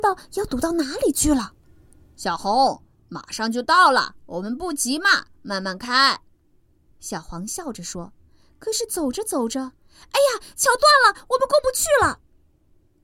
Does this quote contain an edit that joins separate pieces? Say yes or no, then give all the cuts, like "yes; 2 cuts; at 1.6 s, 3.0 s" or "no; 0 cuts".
no; 0 cuts